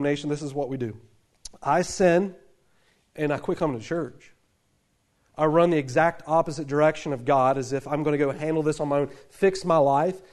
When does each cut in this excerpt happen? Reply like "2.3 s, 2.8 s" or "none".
none

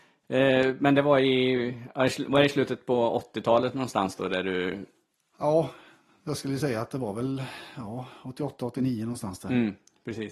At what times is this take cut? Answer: none

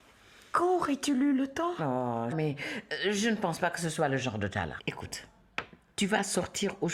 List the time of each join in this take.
2.3 s, 4.8 s

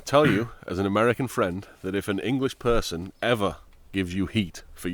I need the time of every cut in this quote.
none

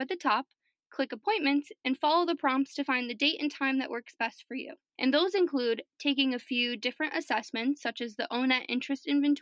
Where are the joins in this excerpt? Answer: 5.0 s

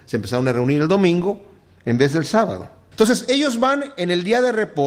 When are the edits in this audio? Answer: 2.9 s

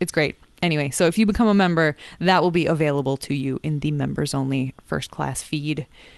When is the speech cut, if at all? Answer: none

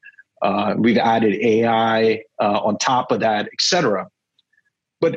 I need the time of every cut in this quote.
none

